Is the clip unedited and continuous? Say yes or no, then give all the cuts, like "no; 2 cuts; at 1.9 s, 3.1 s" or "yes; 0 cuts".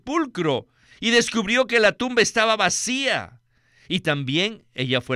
yes; 0 cuts